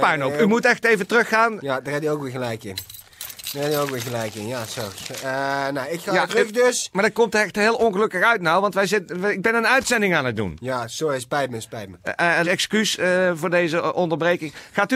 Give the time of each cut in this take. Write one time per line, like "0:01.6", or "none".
0:06.3
0:12.4